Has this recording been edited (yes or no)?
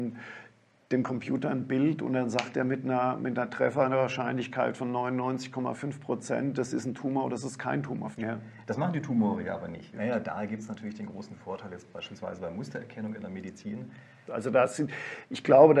yes